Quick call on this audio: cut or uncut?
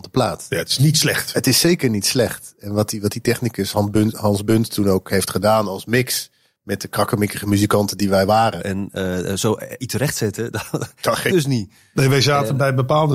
cut